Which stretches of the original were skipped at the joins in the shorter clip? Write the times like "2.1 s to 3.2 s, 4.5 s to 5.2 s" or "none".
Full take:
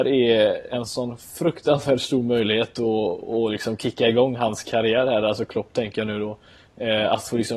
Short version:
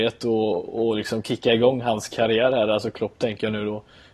none